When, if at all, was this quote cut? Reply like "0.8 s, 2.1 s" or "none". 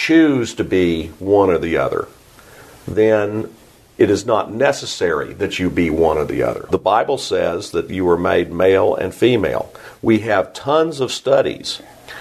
none